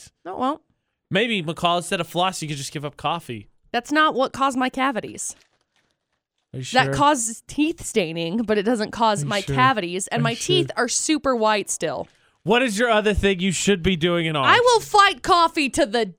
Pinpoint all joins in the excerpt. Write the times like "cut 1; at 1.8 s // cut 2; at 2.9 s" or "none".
none